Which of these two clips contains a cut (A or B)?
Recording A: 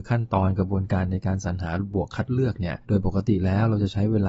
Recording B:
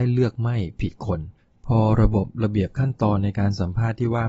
A